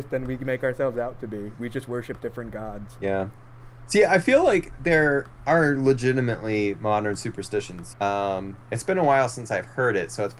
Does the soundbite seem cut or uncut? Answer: cut